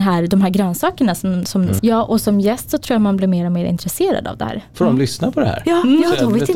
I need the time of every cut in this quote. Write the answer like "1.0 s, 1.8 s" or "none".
1.8 s, 4.7 s

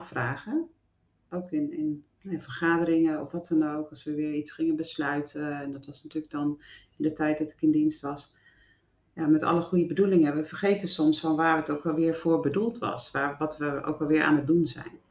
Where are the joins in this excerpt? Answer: none

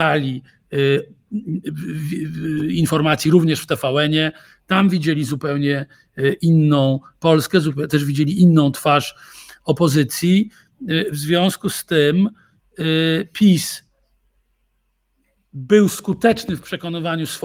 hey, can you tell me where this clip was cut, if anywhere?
none

